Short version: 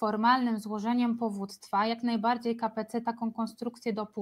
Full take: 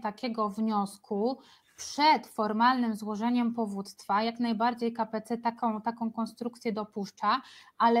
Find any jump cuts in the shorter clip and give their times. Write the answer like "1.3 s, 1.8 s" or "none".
3.0 s